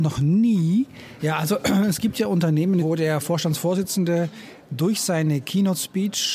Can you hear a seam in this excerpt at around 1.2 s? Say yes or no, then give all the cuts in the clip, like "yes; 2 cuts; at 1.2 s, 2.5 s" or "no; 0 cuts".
yes; 2 cuts; at 1.2 s, 2.8 s